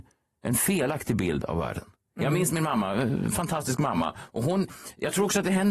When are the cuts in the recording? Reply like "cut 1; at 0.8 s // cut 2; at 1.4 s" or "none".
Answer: none